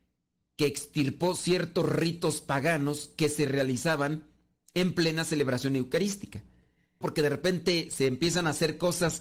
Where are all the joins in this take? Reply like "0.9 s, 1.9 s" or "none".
7.0 s

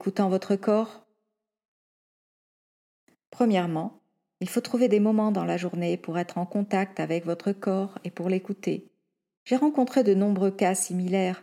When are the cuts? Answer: 9.4 s

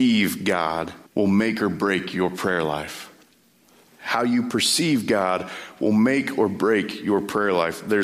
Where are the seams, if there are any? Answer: 1.1 s

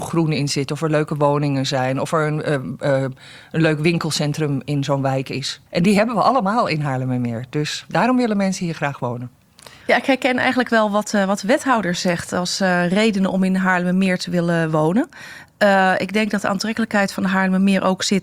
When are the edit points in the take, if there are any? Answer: 5.7 s, 9.8 s

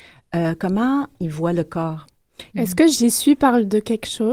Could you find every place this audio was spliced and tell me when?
2.5 s

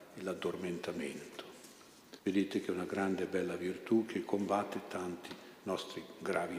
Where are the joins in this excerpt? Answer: 2.2 s

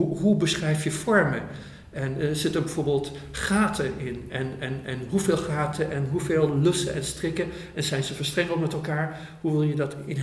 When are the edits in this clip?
none

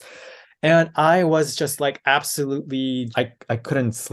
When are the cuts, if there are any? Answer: 3.1 s

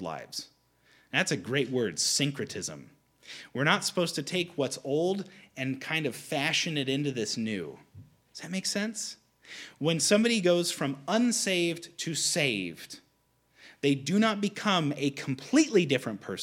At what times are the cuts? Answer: none

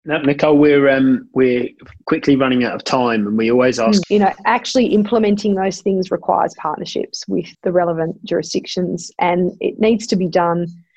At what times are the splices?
4.0 s, 7.5 s

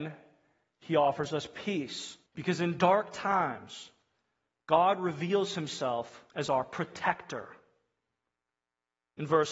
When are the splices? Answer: 2.3 s, 6.3 s

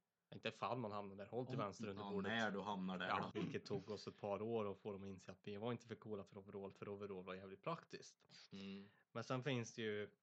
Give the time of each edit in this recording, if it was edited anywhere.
3.3 s

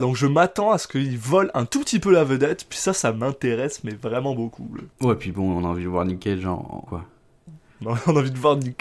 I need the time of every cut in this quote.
4.9 s, 6.9 s

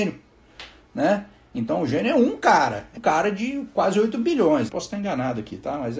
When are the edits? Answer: 3.0 s, 4.7 s

